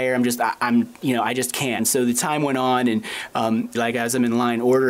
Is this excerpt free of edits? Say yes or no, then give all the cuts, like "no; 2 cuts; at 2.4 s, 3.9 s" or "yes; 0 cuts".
no; 2 cuts; at 1.8 s, 3.7 s